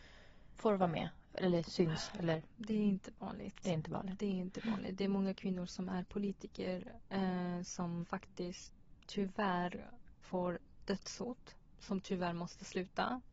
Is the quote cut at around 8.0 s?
yes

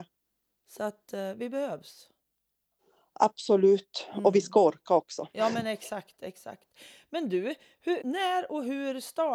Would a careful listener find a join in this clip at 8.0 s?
yes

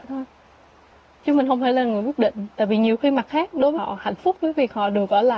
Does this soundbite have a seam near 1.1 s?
no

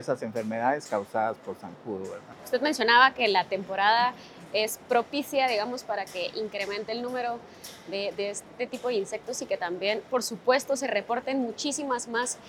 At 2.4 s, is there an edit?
yes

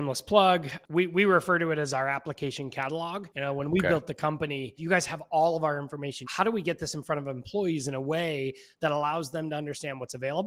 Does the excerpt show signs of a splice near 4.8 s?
yes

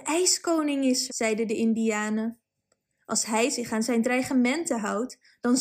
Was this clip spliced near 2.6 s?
no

